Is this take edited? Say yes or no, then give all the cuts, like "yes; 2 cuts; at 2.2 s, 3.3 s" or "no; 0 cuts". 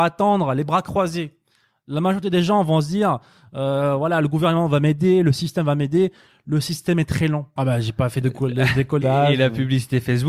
yes; 2 cuts; at 7.6 s, 9.0 s